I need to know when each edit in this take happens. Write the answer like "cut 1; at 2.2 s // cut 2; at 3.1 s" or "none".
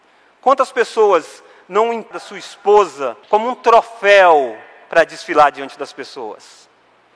cut 1; at 2.1 s // cut 2; at 3.2 s